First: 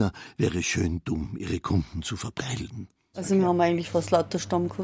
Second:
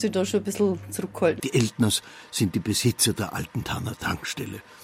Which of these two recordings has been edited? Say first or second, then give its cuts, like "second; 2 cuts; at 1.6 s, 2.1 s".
second; 1 cut; at 1.4 s